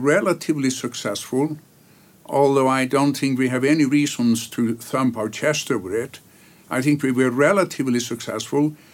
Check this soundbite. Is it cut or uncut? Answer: uncut